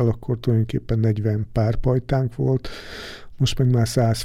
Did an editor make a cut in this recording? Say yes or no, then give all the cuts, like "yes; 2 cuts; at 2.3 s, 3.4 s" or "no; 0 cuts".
no; 0 cuts